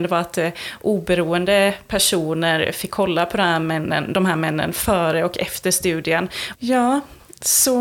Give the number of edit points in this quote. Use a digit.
1